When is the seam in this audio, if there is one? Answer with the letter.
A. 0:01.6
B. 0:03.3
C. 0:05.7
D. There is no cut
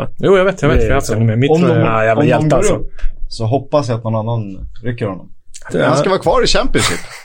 C